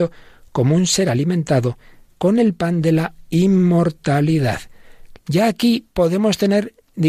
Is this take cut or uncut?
cut